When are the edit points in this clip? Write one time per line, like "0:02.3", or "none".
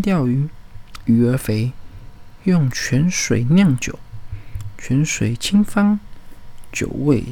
0:01.1